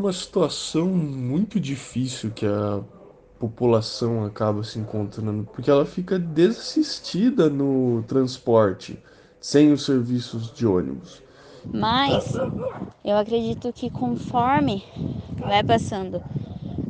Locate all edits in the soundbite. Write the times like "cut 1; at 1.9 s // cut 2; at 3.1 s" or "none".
cut 1; at 5.5 s // cut 2; at 11.6 s